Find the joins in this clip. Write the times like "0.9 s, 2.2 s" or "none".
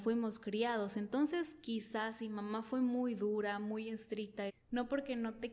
4.5 s